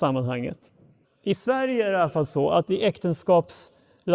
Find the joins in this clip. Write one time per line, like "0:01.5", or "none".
0:01.0